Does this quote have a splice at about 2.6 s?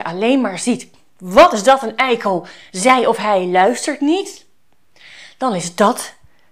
no; 0 cuts

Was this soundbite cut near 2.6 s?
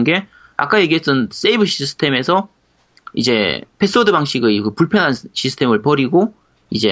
no; 0 cuts

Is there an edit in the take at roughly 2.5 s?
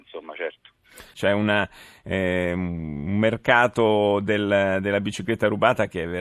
no; 1 cut; at 1.1 s

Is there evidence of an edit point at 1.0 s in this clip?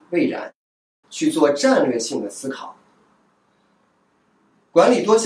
yes; 1 cut; at 1.0 s

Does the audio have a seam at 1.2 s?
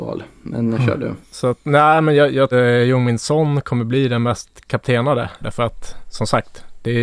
yes; 3 cuts; at 1.2 s, 2.5 s, 5.4 s

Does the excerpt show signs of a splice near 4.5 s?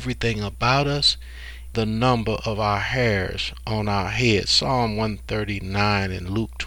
no; 1 cut; at 1.7 s

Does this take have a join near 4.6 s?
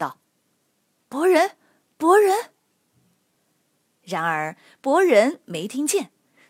no; 0 cuts

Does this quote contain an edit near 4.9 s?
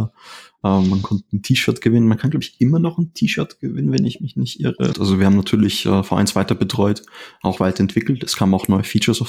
yes; 1 cut; at 4.9 s

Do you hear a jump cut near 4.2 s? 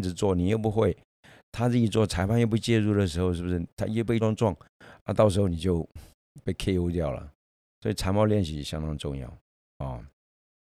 yes; 1 cut; at 4.2 s

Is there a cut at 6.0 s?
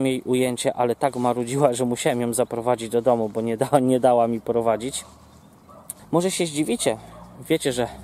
yes; 1 cut; at 6.0 s

